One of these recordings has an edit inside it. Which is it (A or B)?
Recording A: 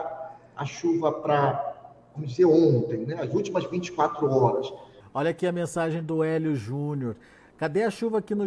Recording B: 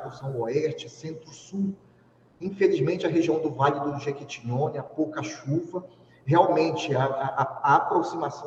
A